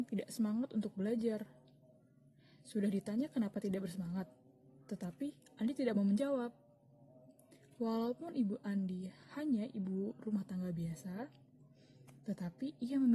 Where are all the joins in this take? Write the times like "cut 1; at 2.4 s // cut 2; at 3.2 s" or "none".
none